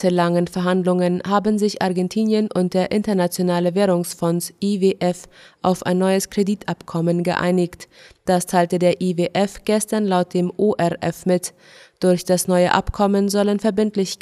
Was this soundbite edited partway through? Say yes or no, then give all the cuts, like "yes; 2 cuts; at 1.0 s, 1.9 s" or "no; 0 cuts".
no; 0 cuts